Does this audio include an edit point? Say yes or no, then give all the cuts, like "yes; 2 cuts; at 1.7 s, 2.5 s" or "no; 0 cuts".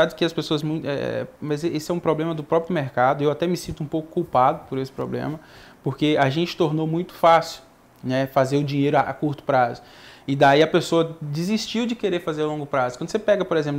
no; 0 cuts